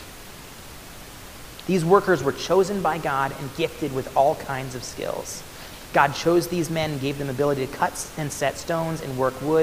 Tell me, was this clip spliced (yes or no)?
no